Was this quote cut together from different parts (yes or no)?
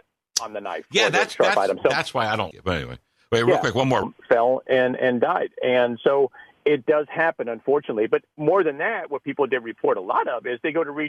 yes